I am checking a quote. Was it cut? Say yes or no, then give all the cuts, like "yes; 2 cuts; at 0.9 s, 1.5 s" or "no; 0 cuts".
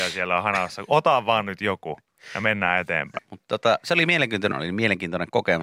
yes; 2 cuts; at 3.2 s, 4.5 s